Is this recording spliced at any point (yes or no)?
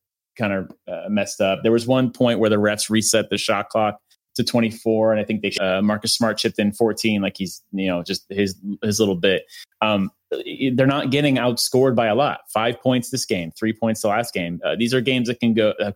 yes